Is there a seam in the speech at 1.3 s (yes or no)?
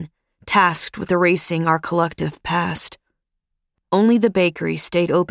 no